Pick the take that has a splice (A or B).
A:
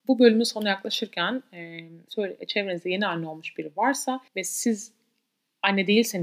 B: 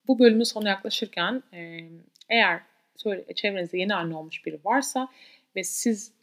A